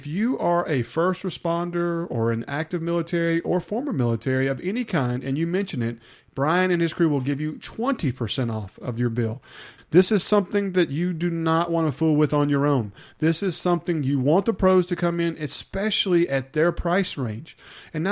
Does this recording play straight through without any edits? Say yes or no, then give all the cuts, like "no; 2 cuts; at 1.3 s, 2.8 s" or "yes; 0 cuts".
no; 1 cut; at 9.8 s